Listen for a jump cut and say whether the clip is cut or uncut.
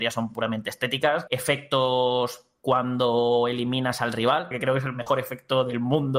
cut